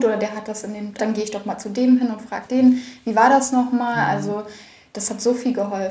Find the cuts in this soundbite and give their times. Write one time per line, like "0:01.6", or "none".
0:01.0